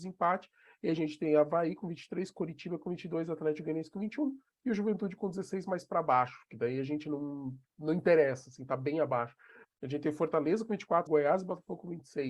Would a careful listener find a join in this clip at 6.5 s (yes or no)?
no